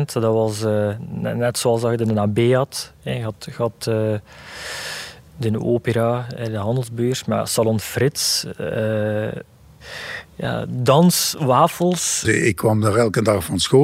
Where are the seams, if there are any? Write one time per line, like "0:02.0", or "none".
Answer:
0:12.2